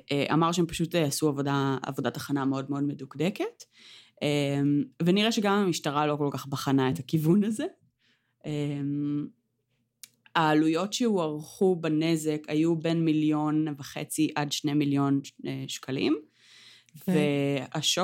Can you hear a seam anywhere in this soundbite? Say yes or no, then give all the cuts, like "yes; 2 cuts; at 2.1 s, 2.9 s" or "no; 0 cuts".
no; 0 cuts